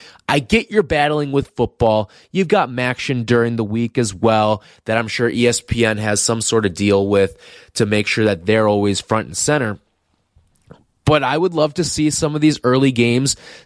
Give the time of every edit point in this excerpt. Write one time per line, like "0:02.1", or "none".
none

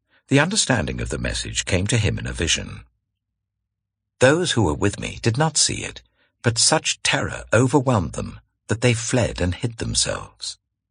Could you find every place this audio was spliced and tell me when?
0:04.1

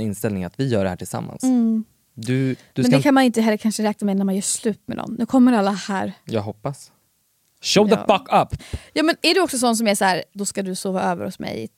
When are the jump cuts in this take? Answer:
0:08.6
0:10.3

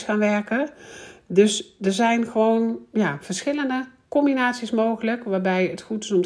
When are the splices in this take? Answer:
none

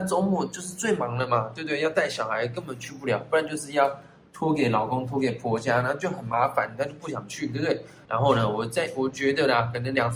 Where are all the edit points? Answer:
0:08.0

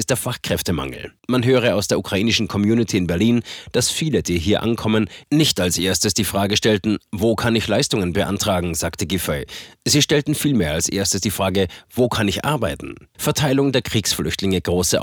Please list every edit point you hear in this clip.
0:01.2
0:13.1

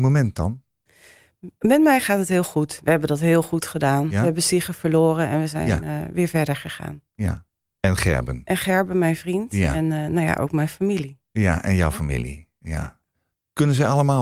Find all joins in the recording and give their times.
0:07.8

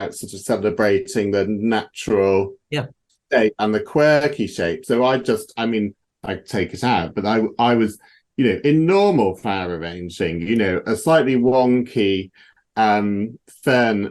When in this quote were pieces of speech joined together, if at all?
none

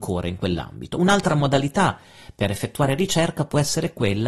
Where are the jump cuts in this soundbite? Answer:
none

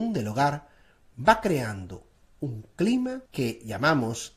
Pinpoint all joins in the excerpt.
0:03.3

